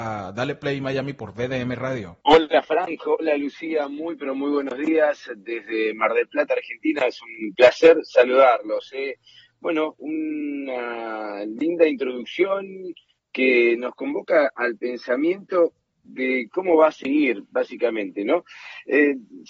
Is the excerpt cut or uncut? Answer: cut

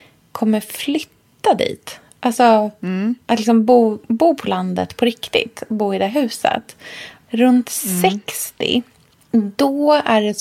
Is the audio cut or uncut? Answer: cut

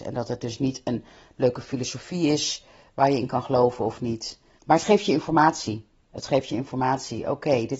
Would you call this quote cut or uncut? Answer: cut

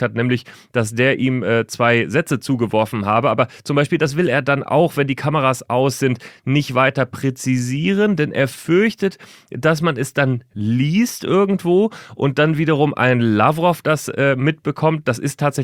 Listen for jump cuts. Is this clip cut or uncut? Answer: uncut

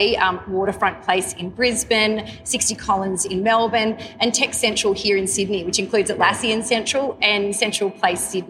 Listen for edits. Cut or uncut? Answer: uncut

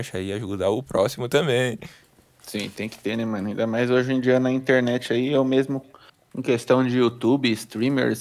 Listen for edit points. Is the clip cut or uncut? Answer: uncut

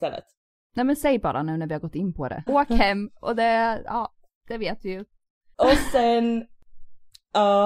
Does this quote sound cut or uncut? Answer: cut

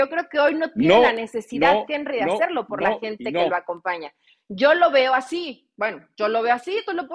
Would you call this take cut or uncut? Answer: uncut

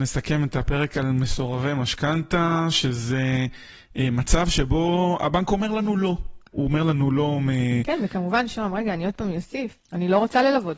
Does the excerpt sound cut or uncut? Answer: cut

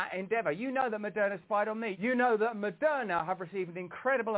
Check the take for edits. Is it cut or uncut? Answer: cut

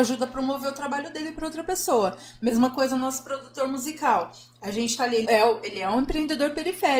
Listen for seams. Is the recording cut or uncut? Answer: cut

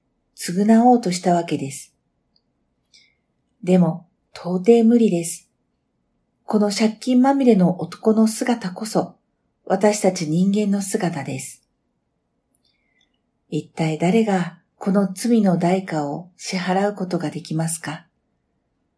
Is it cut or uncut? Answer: uncut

